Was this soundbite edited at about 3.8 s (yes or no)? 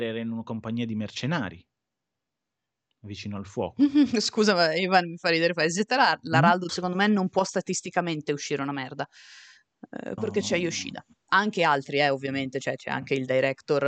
no